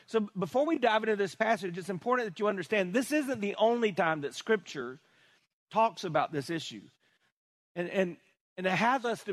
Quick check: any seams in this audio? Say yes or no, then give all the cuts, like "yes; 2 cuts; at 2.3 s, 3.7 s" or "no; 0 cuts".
no; 0 cuts